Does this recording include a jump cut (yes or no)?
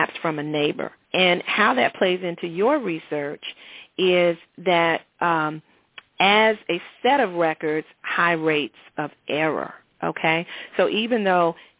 yes